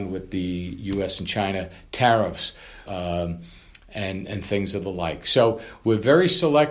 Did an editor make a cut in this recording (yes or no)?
yes